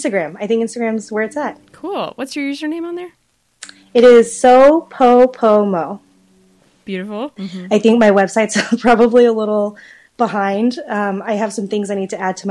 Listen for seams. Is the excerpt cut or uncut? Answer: cut